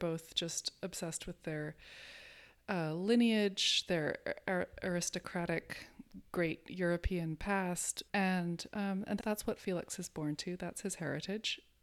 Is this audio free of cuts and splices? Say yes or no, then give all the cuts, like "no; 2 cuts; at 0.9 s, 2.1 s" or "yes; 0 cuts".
no; 2 cuts; at 8.1 s, 9.2 s